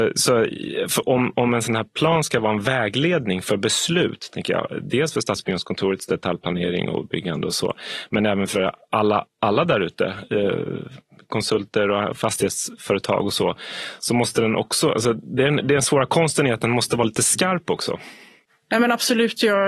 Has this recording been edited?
no; 0 cuts

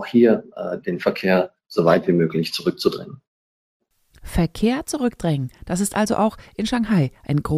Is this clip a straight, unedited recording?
yes; 0 cuts

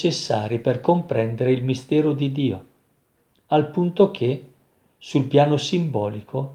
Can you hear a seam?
no; 0 cuts

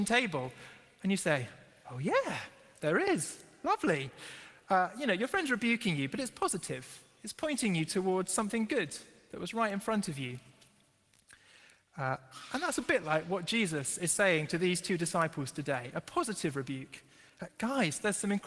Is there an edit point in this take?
no; 0 cuts

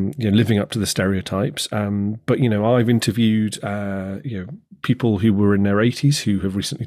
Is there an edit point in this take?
no; 0 cuts

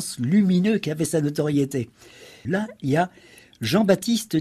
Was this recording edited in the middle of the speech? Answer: yes; 1 cut; at 2.5 s

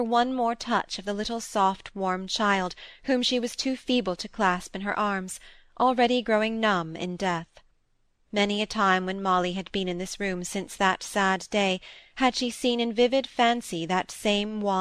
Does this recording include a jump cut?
no; 0 cuts

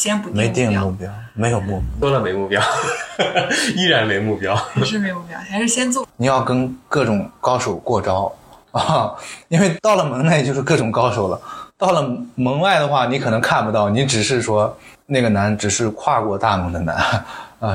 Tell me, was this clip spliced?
yes; 1 cut; at 6.0 s

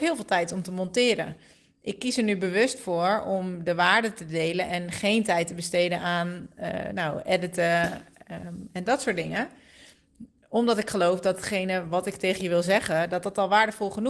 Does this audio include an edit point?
no; 0 cuts

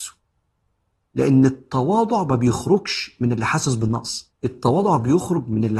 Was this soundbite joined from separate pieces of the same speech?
yes; 1 cut; at 4.4 s

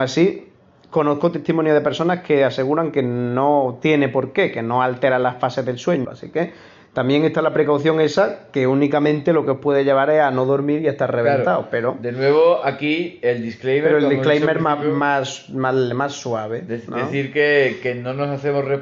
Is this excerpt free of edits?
no; 1 cut; at 6.0 s

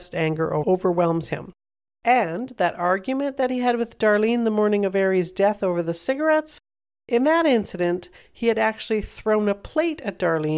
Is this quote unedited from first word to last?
no; 1 cut; at 1.9 s

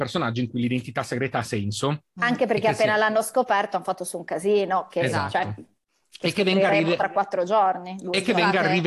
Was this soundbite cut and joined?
no; 0 cuts

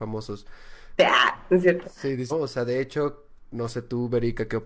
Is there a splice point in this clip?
yes; 2 cuts; at 1.0 s, 2.3 s

